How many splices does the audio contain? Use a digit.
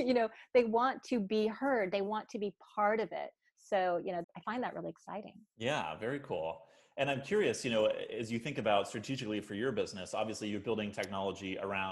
1